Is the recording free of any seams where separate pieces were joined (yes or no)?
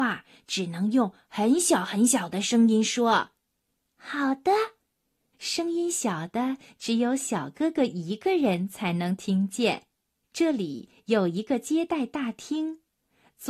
no